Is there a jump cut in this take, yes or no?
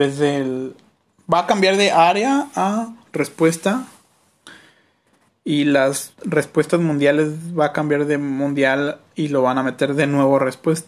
no